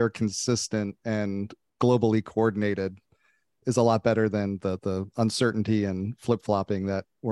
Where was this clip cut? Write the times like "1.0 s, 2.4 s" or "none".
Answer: 4.8 s